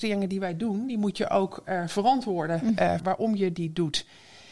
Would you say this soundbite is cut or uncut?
cut